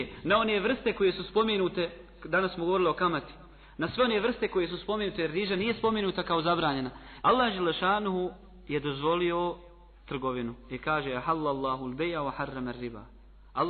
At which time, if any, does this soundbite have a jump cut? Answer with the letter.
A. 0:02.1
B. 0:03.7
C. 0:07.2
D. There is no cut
C